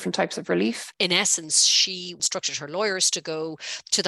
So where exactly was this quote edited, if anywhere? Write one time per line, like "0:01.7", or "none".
0:00.9